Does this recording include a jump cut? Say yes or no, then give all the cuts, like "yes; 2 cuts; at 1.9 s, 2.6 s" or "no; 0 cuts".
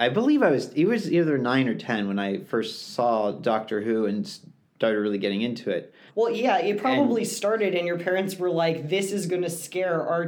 yes; 1 cut; at 6.1 s